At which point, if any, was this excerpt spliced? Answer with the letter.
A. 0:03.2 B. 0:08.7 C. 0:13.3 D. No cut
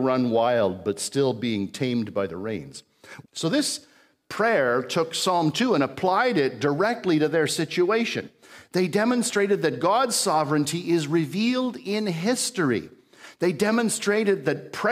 A